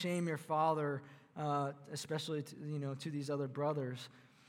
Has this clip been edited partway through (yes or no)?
no